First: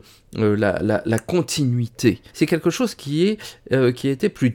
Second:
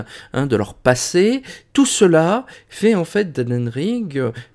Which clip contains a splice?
first; 1 cut; at 2.3 s

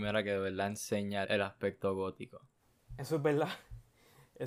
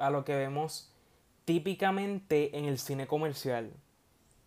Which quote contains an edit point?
first; 1 cut; at 1.2 s

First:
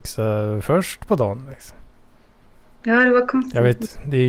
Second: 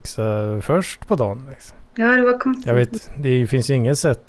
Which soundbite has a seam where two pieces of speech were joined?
second; 1 cut; at 1.9 s

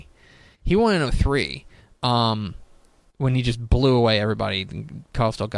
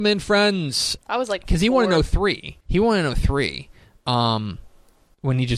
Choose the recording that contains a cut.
second; 2 cuts; at 1.0 s, 2.6 s

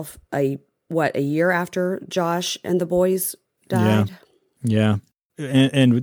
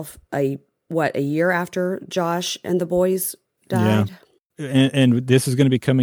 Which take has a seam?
second; 1 cut; at 4.4 s

